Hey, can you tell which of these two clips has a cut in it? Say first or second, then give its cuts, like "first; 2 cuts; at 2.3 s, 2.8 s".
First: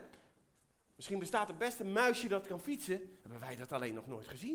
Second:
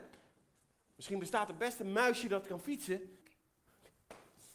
second; 1 cut; at 3.2 s